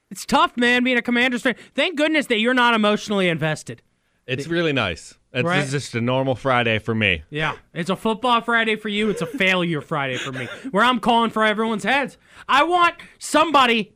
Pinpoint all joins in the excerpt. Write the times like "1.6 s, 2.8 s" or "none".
none